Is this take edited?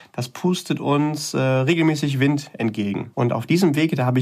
yes; 1 cut; at 3.1 s

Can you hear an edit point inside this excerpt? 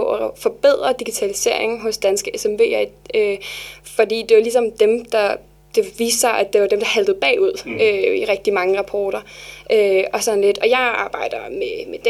yes; 1 cut; at 10.6 s

